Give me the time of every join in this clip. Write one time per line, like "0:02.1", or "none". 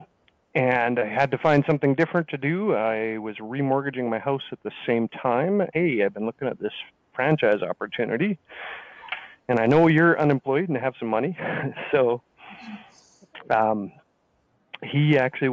0:05.7